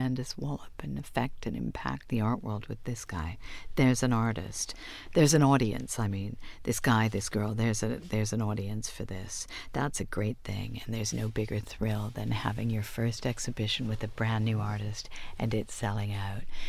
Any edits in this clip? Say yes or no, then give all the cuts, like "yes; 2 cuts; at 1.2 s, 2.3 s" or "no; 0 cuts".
no; 0 cuts